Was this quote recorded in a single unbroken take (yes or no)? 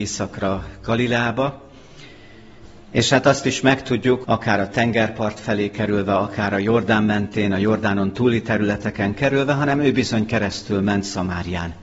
no